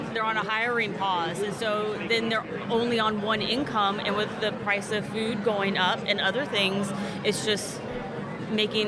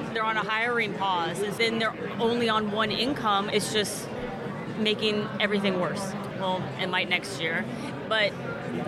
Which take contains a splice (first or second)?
second